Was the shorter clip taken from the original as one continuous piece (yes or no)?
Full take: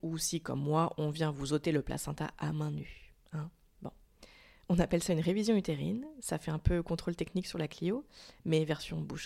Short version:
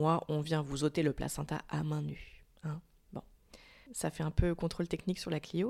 no